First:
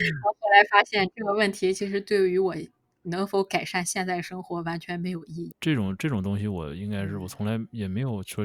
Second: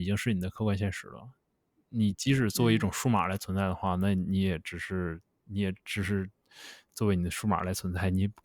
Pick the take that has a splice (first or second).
first